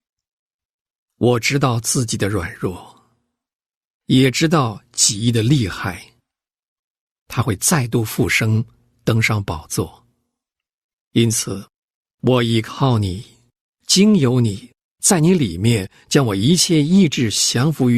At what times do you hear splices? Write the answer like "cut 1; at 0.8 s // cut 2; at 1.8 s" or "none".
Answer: cut 1; at 12.1 s

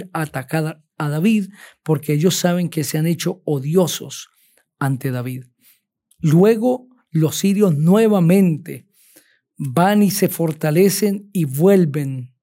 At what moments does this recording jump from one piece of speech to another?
cut 1; at 6.1 s

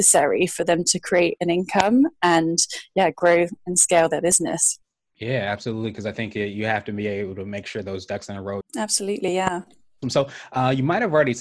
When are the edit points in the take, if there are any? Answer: cut 1; at 8.6 s // cut 2; at 10.0 s

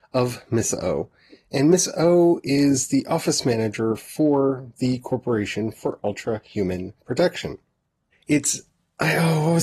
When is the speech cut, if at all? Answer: cut 1; at 8.1 s

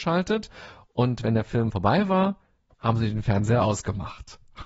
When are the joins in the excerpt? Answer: cut 1; at 2.7 s

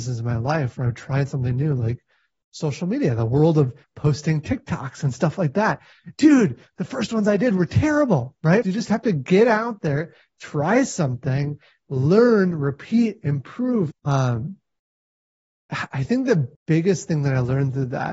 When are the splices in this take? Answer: cut 1; at 8.6 s // cut 2; at 13.9 s // cut 3; at 16.6 s

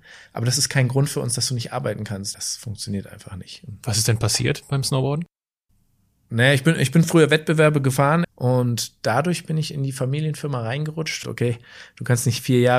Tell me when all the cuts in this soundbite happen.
cut 1; at 2.3 s // cut 2; at 8.2 s // cut 3; at 11.2 s

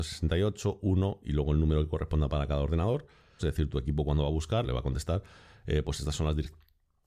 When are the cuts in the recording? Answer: cut 1; at 3.4 s // cut 2; at 4.6 s

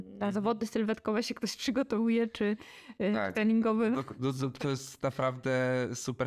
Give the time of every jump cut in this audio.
cut 1; at 3.3 s

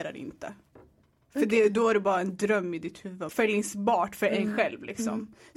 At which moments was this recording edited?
cut 1; at 3.3 s

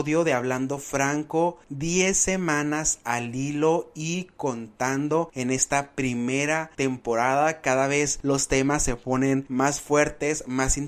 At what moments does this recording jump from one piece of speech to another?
none

